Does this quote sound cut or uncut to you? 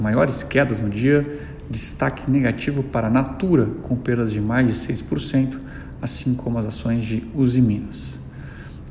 uncut